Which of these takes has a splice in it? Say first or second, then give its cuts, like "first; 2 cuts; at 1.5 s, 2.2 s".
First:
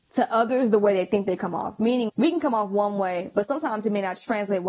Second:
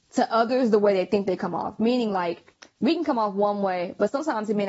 first; 1 cut; at 2.1 s